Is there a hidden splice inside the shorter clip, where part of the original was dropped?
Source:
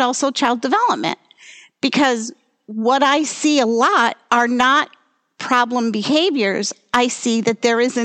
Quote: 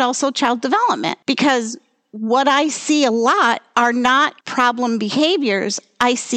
yes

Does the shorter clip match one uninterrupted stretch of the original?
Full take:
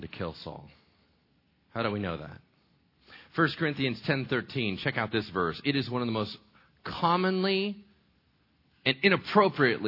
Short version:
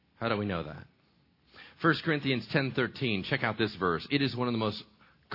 yes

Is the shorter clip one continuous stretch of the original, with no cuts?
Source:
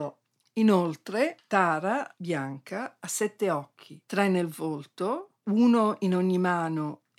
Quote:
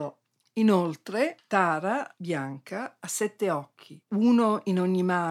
no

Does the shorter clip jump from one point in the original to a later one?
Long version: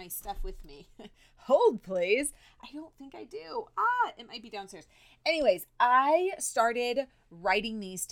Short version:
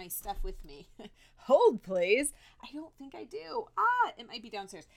no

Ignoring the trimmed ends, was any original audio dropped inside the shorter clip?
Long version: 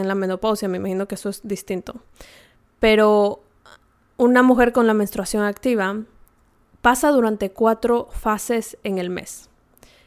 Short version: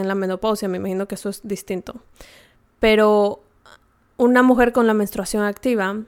no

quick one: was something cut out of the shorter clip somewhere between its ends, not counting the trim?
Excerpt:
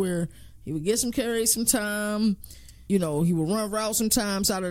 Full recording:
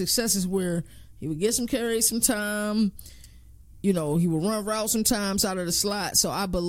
yes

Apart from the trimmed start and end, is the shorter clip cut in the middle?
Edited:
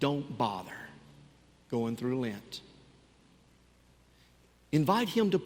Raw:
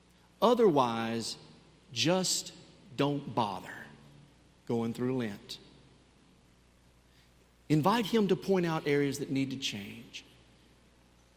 no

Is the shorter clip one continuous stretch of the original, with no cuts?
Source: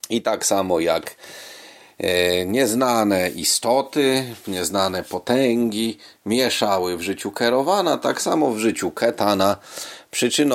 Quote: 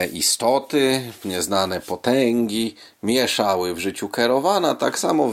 yes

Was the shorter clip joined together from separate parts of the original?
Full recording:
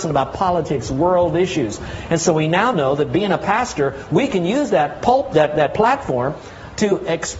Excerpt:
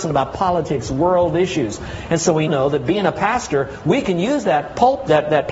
yes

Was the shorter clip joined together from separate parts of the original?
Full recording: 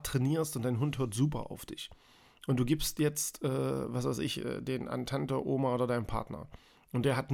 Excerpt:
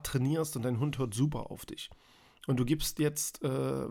no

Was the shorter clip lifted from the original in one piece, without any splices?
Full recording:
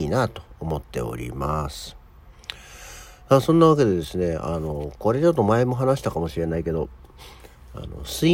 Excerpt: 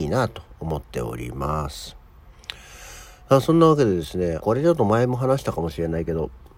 no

